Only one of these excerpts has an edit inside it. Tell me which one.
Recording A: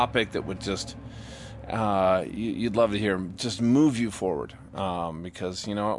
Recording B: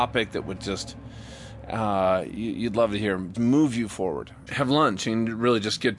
B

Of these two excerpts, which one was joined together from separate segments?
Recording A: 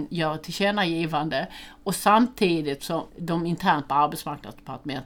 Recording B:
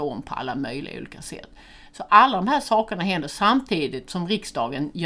A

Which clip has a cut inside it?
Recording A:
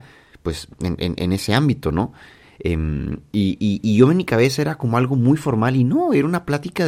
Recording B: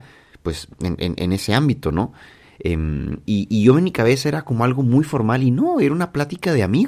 B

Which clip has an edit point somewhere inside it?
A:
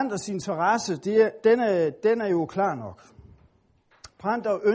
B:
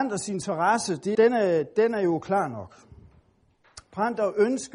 B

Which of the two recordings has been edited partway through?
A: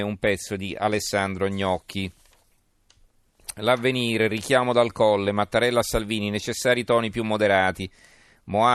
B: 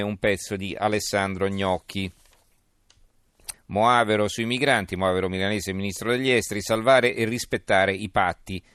B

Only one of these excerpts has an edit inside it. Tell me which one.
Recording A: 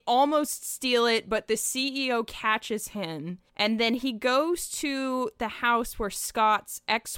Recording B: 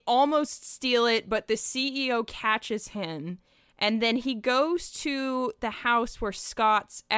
A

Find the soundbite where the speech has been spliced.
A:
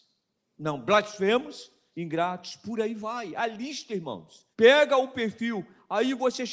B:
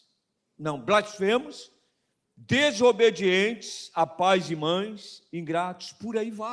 A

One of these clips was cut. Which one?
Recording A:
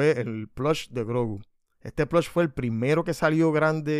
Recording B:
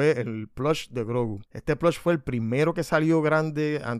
B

